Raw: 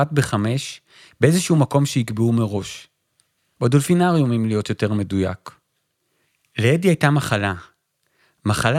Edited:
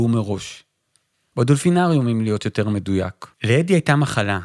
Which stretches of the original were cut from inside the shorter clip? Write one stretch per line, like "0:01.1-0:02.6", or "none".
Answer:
0:05.6-0:06.5